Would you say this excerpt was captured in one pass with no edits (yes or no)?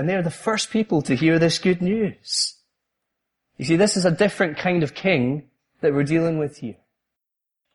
yes